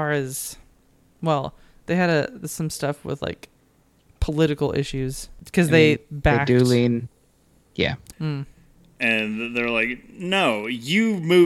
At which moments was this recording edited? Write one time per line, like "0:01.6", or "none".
0:06.0
0:08.1

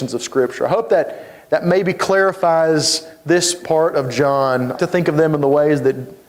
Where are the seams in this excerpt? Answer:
0:04.8

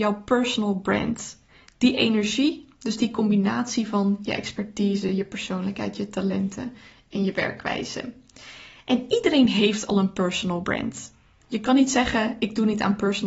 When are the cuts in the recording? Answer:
none

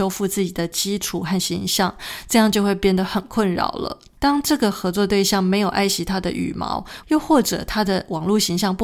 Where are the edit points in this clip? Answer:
0:04.2
0:07.0

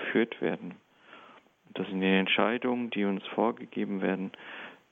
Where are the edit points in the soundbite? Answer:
none

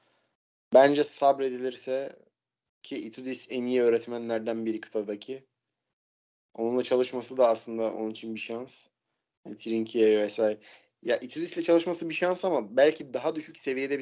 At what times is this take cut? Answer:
none

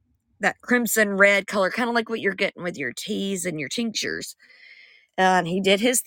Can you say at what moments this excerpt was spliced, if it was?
0:05.1

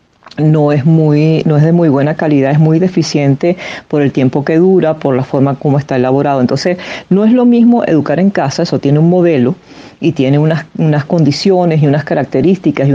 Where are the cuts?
none

